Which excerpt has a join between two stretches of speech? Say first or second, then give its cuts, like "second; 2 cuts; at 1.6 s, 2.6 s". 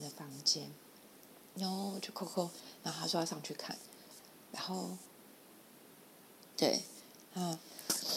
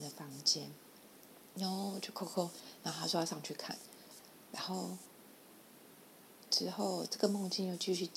first; 1 cut; at 6.4 s